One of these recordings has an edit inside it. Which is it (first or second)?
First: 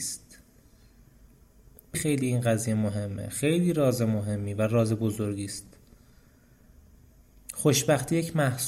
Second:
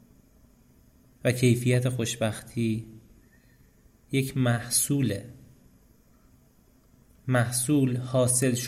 first